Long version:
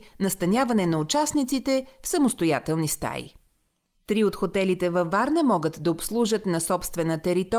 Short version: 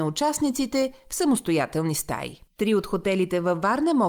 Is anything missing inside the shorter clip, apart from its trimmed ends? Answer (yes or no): yes